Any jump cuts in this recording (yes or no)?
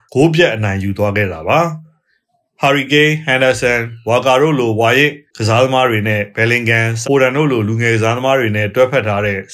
yes